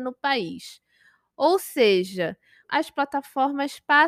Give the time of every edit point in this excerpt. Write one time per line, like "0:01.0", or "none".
0:02.6